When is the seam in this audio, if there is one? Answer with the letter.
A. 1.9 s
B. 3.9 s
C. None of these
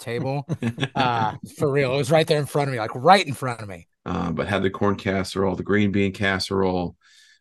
B